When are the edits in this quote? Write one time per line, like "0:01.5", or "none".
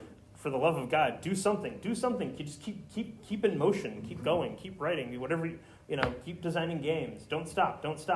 none